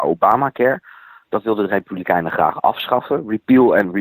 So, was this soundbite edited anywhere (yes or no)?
no